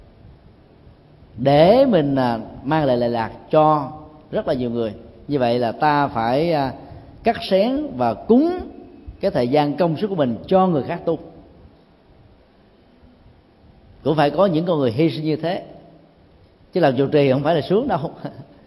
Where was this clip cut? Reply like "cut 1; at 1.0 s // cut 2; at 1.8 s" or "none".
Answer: none